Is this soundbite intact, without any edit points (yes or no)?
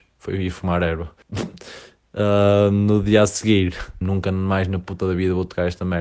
no